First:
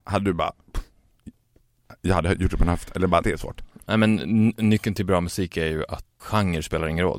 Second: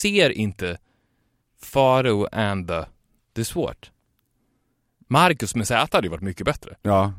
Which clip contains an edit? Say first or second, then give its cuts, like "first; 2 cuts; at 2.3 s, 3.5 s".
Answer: first; 2 cuts; at 3.2 s, 6.2 s